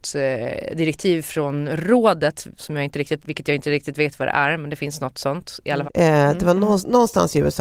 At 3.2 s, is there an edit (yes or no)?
yes